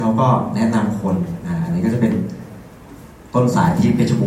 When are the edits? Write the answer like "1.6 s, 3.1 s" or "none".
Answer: none